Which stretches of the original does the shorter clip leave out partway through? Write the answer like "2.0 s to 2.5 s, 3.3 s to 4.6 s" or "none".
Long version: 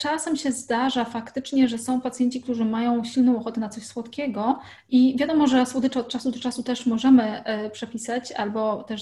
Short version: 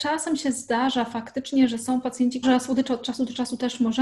2.4 s to 5.5 s